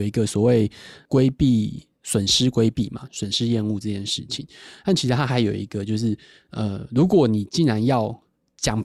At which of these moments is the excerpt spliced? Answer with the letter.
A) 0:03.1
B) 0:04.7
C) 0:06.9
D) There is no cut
A